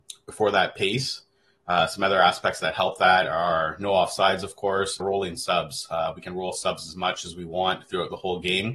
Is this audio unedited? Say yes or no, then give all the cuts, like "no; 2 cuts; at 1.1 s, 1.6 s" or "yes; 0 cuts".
no; 1 cut; at 5.0 s